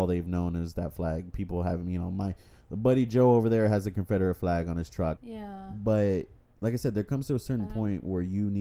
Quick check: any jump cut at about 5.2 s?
yes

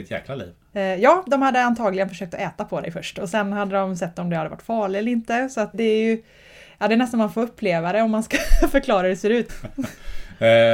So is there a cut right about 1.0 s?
no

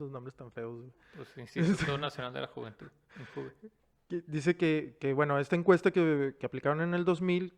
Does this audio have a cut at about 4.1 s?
no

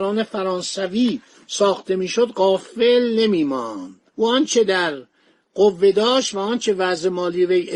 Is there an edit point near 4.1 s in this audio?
yes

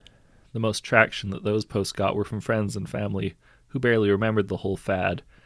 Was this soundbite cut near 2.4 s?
no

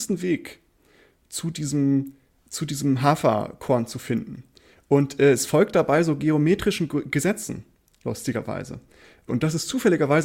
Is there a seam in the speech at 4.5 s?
no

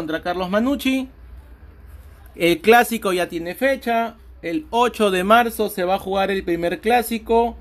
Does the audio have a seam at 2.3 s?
yes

